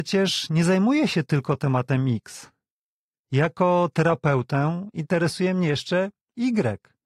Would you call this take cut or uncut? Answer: uncut